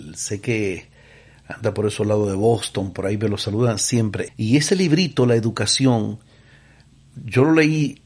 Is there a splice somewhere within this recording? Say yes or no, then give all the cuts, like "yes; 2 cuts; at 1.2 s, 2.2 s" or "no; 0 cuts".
yes; 1 cut; at 4.3 s